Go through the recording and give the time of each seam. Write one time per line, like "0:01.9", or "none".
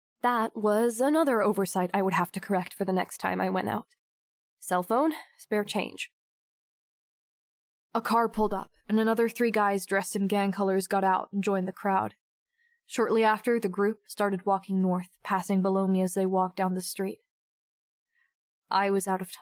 0:14.0